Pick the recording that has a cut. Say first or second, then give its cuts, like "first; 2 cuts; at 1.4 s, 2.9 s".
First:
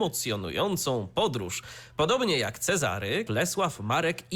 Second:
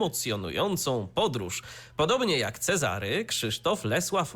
first; 1 cut; at 3.3 s